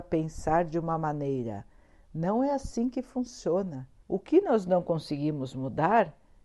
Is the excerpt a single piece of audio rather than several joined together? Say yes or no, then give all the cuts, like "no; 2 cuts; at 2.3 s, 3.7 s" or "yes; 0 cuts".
no; 1 cut; at 4.0 s